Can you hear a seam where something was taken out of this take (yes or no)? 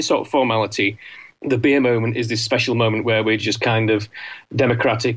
no